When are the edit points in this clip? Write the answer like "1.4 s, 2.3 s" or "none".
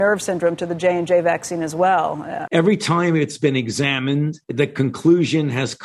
2.5 s, 4.4 s